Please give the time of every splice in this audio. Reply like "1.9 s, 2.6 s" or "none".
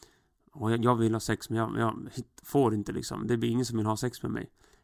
none